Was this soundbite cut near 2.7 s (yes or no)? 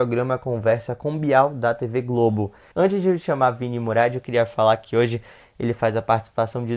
yes